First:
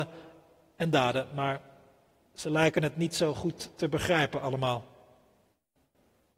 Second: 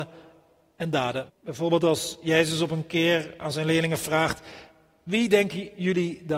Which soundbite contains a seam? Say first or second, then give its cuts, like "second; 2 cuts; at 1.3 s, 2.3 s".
second; 1 cut; at 1.3 s